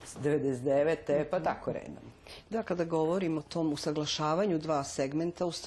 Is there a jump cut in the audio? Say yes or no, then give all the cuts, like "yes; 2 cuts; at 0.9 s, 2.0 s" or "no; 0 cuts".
yes; 1 cut; at 3.4 s